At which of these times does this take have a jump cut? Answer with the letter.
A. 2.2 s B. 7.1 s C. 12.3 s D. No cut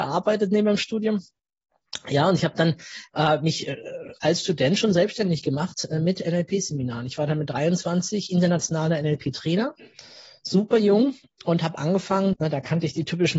C